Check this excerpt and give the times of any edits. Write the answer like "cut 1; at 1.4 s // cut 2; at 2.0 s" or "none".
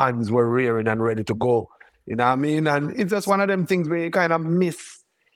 none